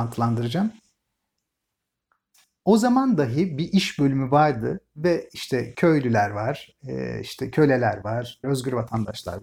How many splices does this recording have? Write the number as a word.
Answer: one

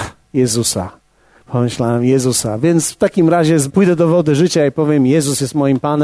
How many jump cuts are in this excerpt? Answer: one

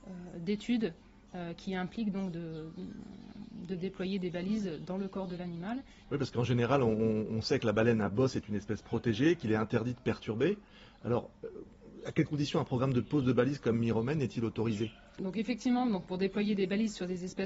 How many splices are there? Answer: one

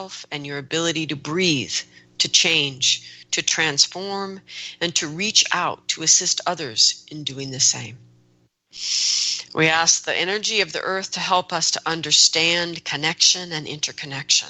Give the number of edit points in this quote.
one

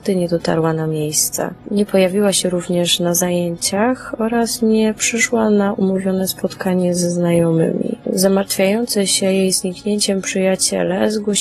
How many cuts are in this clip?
zero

